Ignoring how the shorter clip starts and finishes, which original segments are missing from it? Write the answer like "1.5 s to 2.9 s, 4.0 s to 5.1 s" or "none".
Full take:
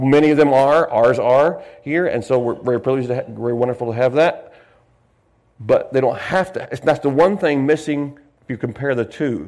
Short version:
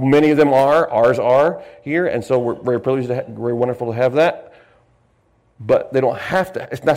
none